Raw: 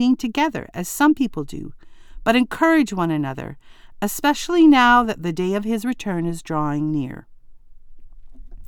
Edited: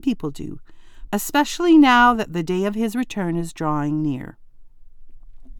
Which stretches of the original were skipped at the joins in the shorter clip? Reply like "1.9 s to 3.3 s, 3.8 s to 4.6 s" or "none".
2.2 s to 4.0 s